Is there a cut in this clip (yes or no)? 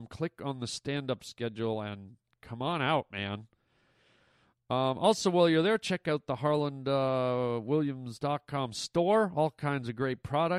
no